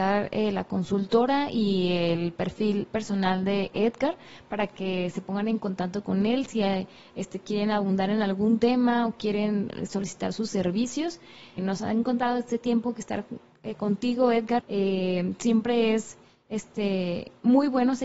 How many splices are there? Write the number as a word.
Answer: two